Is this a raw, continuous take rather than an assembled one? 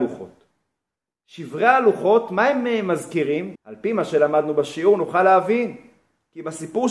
no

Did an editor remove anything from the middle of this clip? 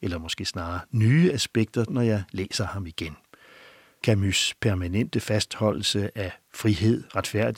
yes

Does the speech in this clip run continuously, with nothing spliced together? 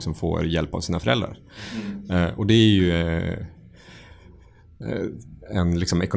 yes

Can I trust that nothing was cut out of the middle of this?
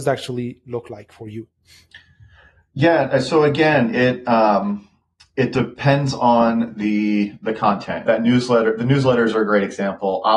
no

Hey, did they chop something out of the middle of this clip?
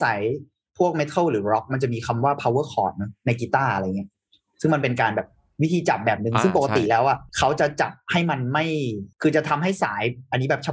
yes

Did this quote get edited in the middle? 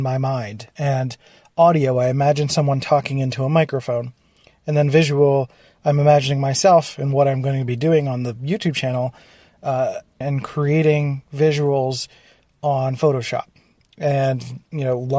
yes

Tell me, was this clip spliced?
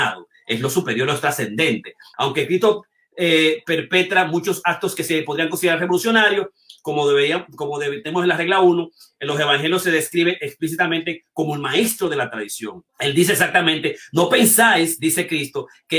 yes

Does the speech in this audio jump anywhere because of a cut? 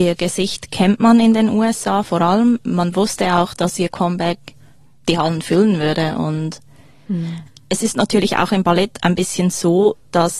no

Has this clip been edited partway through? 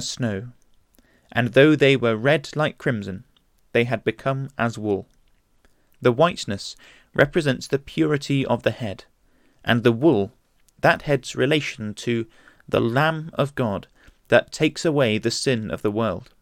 yes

